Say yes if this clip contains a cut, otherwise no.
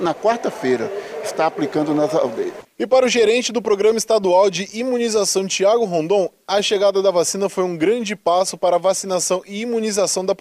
yes